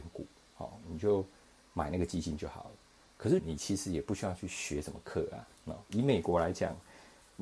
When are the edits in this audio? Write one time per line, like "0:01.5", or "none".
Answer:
0:03.4